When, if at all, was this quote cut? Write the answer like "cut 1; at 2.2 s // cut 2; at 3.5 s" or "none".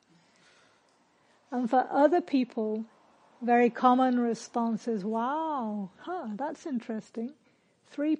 none